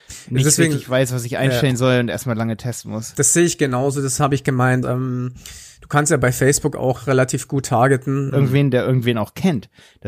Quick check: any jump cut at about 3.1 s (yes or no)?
no